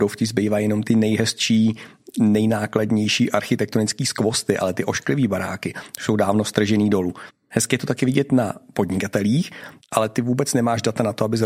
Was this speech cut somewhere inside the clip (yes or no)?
yes